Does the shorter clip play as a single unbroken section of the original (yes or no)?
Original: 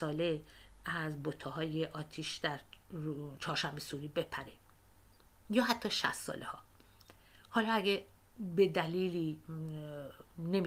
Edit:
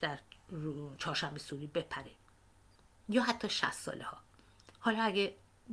no